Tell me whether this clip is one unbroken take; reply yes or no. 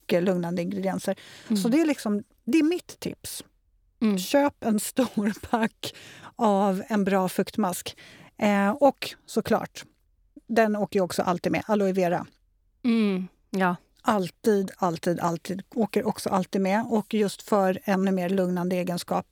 yes